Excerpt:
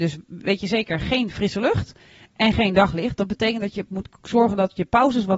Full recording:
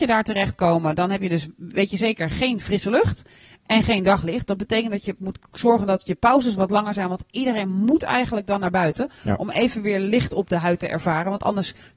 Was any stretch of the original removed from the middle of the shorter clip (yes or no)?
no